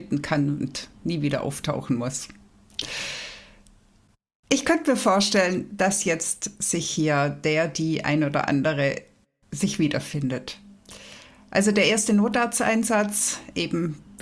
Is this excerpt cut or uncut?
uncut